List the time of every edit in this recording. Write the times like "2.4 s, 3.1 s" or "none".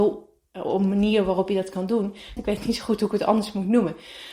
2.4 s